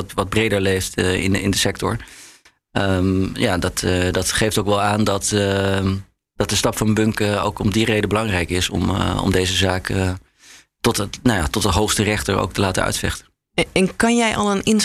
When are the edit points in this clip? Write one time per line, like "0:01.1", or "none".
none